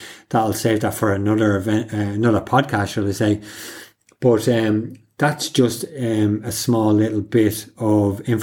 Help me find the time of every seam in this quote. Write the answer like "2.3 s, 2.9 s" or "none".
none